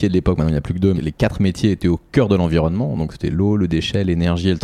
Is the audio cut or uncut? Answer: cut